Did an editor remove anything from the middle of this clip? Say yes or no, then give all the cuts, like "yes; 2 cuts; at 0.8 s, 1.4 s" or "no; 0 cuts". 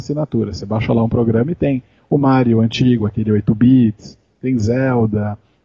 no; 0 cuts